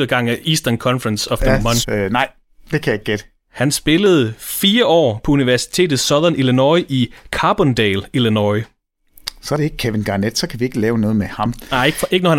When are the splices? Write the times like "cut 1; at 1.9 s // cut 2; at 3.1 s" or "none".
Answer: cut 1; at 1.8 s